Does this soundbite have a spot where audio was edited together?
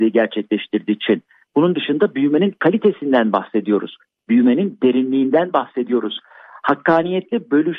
no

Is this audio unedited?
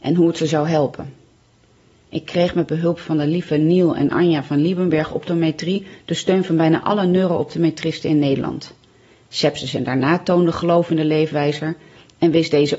yes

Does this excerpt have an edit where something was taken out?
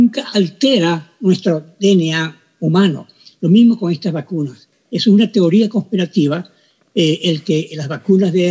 no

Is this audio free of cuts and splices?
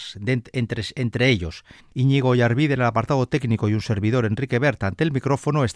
no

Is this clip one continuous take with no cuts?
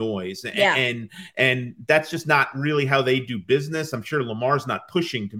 yes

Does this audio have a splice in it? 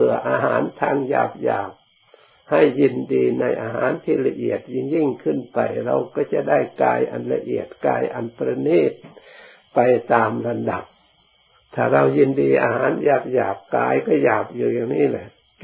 no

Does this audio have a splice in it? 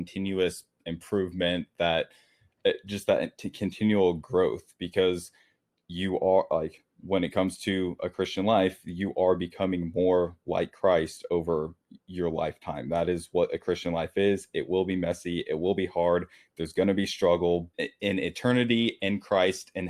yes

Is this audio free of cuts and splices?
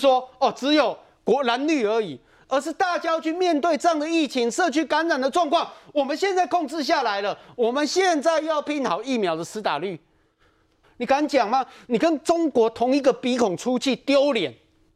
no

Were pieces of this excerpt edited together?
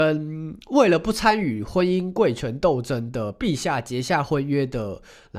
no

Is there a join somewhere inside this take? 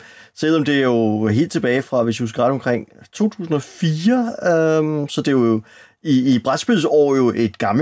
no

